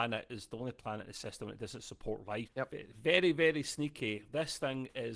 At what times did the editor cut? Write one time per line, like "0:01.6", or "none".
0:02.5